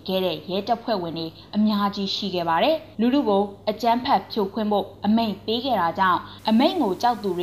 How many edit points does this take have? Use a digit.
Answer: 1